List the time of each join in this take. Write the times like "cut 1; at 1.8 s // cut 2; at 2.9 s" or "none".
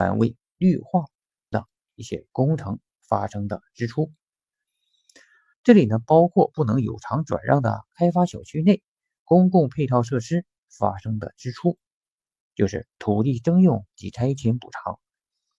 cut 1; at 1.5 s // cut 2; at 5.5 s // cut 3; at 12.4 s